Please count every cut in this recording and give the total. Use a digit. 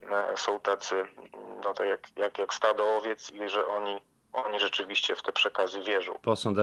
0